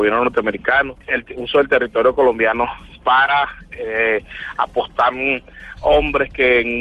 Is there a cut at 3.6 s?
no; 1 cut; at 1.0 s

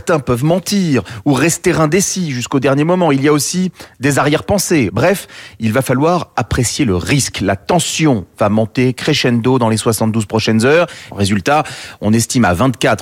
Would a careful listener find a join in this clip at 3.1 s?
no; 2 cuts; at 4.9 s, 11.1 s

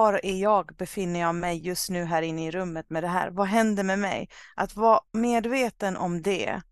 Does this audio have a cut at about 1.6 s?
no; 0 cuts

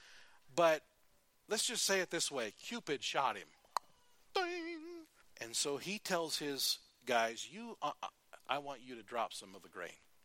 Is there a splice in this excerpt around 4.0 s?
no; 2 cuts; at 5.2 s, 8.4 s

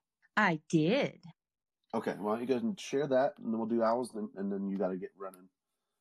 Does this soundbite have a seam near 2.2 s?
no; 0 cuts

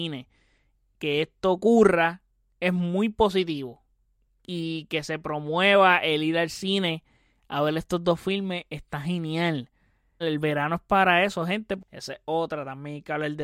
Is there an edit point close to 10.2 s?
yes; 2 cuts; at 10.2 s, 11.8 s

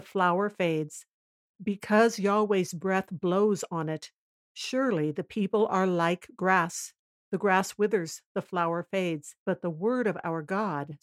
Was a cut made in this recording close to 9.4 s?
yes; 1 cut; at 9.4 s

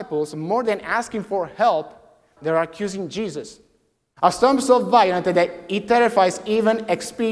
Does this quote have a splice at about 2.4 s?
yes; 2 cuts; at 2.4 s, 4.1 s

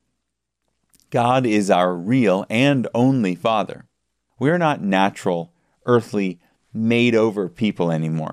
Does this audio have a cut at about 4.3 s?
yes; 1 cut; at 4.3 s

